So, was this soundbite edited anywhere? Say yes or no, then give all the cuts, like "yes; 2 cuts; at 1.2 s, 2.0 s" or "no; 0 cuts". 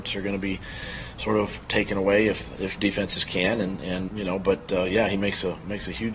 yes; 2 cuts; at 2.5 s, 4.1 s